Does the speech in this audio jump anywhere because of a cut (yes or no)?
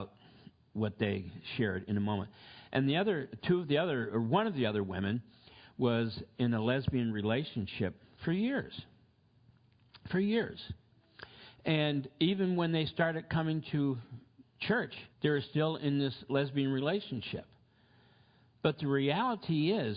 yes